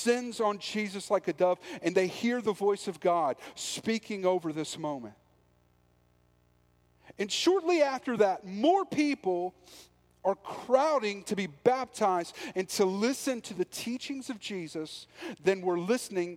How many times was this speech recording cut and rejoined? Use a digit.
0